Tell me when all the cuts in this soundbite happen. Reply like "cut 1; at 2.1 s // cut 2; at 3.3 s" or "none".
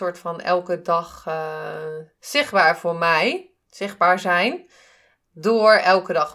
cut 1; at 2.1 s